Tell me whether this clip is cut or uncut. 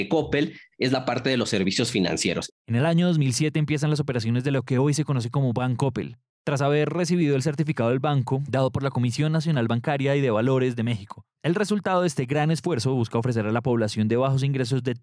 uncut